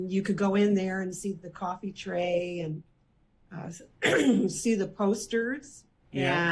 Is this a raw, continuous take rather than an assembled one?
yes; 0 cuts

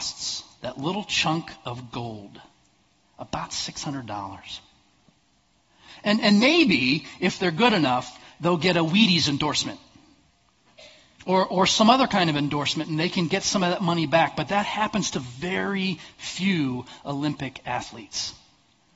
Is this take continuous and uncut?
yes; 0 cuts

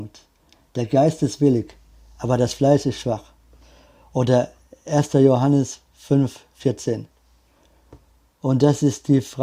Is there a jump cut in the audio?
no; 0 cuts

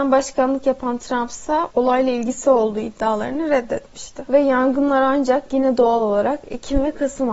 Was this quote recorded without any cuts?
no; 1 cut; at 4.3 s

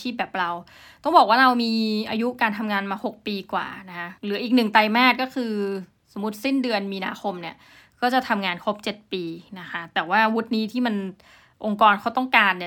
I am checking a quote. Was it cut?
yes; 1 cut; at 4.2 s

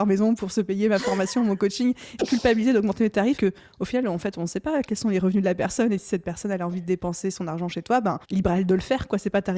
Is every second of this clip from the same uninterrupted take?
no; 3 cuts; at 2.2 s, 3.4 s, 8.2 s

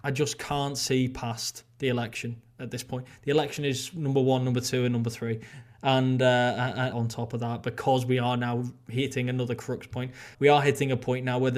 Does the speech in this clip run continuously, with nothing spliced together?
no; 2 cuts; at 6.9 s, 10.3 s

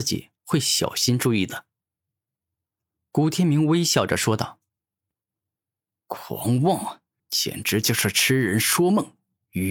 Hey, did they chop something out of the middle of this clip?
yes; 1 cut; at 7.2 s

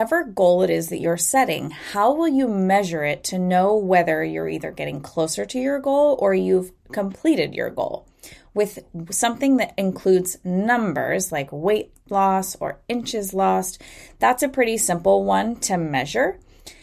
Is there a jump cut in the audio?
no; 0 cuts

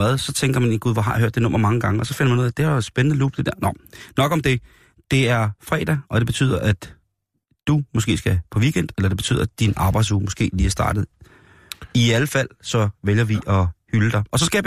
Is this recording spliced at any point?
no; 0 cuts

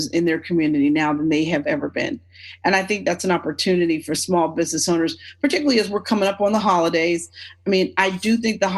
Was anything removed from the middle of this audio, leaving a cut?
no; 0 cuts

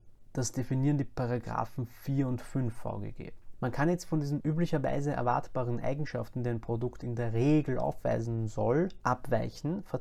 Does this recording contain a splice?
no; 0 cuts

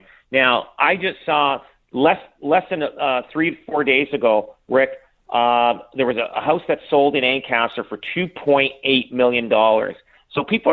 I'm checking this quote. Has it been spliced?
no; 0 cuts

